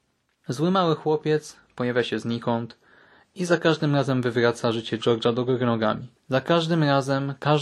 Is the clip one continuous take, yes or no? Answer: no